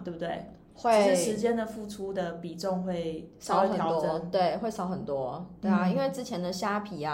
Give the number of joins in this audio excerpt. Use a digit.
0